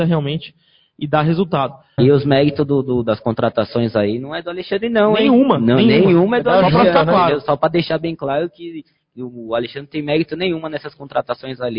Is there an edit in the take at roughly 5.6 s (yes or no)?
no